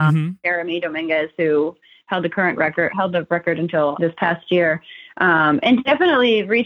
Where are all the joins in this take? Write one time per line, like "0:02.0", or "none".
0:02.9
0:03.9